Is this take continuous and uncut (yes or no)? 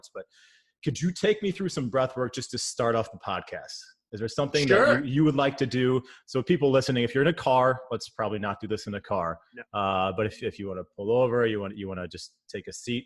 yes